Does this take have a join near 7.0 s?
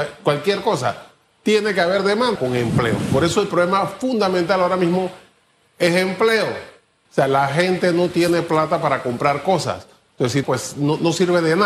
yes; 3 cuts; at 2.4 s, 7.0 s, 10.4 s

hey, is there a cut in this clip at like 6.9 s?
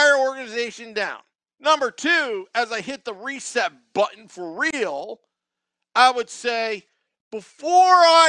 no; 1 cut; at 1.5 s

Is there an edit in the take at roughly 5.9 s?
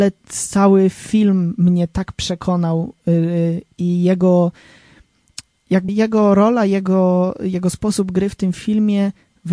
yes; 1 cut; at 5.9 s

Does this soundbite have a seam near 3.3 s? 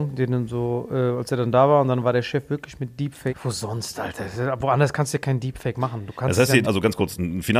yes; 2 cuts; at 3.3 s, 6.6 s

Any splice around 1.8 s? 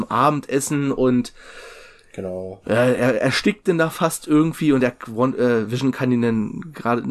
no; 0 cuts

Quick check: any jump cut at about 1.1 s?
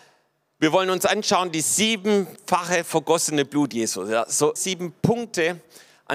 no; 1 cut; at 4.6 s

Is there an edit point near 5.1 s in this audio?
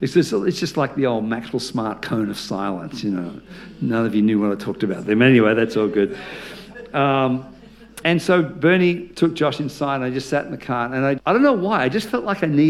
no; 2 cuts; at 8.0 s, 11.2 s

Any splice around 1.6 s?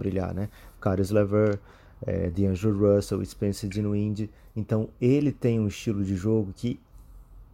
no; 0 cuts

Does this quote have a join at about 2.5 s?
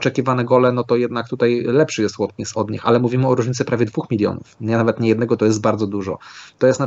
yes; 2 cuts; at 2.5 s, 5.4 s

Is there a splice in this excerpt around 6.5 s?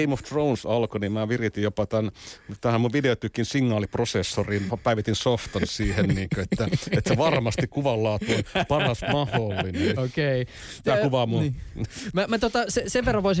no; 1 cut; at 10.0 s

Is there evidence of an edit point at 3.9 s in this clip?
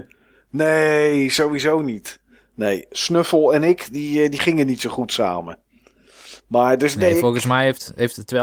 no; 0 cuts

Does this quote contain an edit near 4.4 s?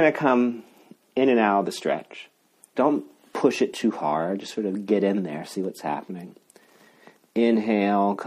no; 1 cut; at 2.7 s

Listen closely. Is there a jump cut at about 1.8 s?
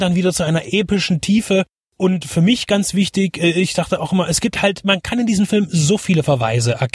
no; 0 cuts

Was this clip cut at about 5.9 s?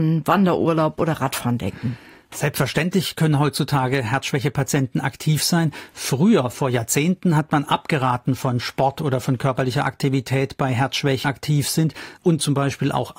no; 1 cut; at 11.2 s

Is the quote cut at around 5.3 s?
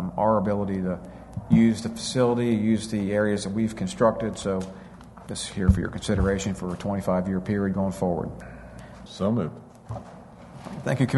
yes; 2 cuts; at 5.3 s, 9.1 s

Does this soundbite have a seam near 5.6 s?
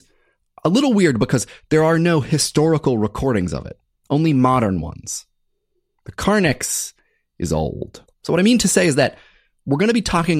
no; 1 cut; at 8.1 s

